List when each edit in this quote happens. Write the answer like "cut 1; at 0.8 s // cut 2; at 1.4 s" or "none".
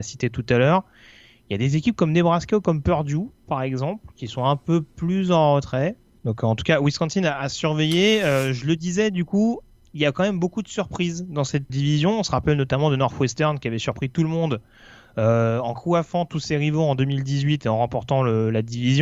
cut 1; at 6.2 s // cut 2; at 11.7 s